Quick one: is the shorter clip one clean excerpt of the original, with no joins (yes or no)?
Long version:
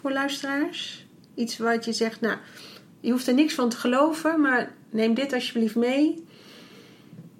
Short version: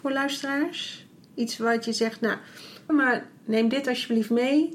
no